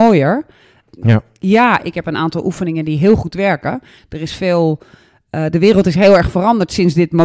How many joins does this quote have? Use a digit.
2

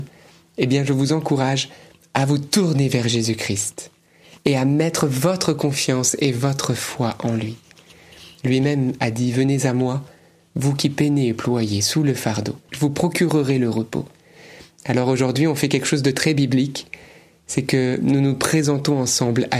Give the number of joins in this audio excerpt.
1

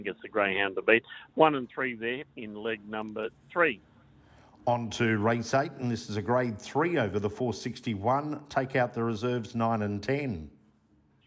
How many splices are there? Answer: 1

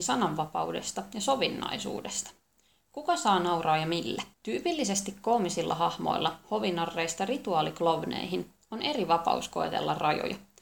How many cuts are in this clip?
1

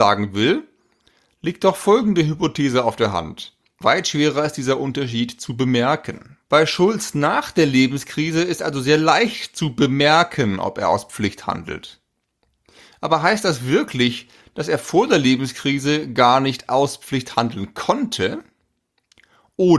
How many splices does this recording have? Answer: 2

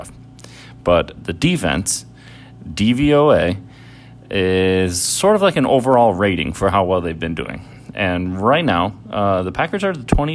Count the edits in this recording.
1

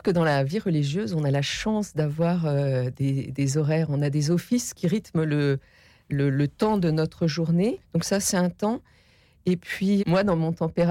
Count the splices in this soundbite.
2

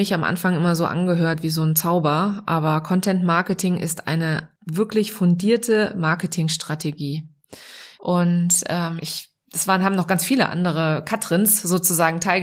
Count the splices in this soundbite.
2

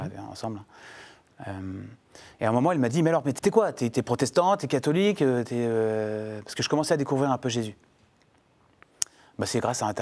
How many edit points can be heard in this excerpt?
1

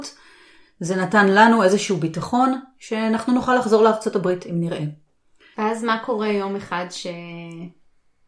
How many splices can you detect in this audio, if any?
1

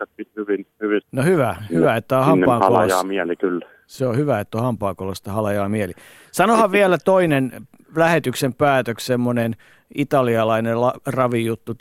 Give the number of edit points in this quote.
1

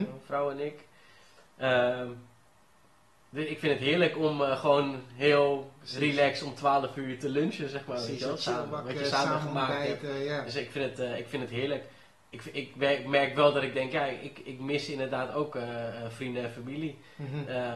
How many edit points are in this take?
0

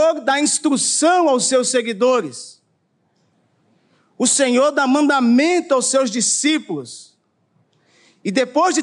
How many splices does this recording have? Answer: 0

